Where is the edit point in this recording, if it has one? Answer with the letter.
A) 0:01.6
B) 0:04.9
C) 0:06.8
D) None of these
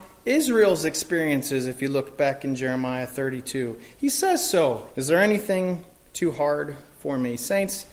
B